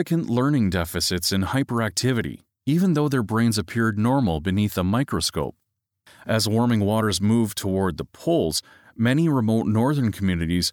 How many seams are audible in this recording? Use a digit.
1